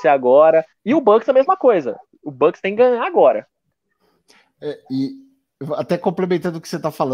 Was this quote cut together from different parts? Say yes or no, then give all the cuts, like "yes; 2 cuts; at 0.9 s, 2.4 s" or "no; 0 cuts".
no; 0 cuts